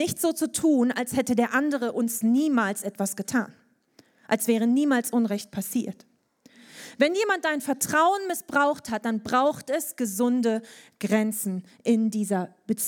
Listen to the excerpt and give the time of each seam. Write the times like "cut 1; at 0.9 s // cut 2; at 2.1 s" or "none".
none